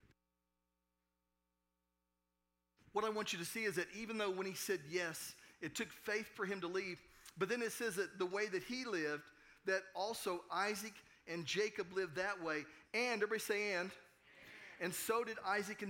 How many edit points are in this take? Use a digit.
1